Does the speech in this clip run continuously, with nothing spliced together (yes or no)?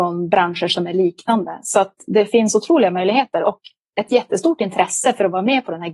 yes